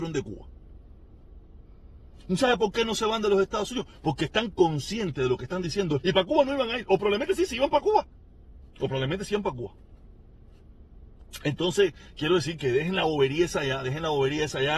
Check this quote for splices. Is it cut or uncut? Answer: cut